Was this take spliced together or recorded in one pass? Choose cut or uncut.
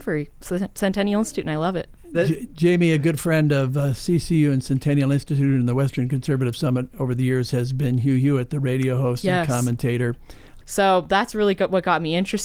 cut